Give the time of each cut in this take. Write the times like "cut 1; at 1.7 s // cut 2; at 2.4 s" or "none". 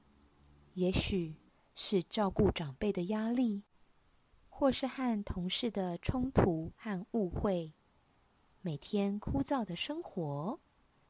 none